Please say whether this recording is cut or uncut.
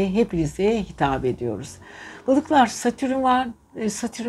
uncut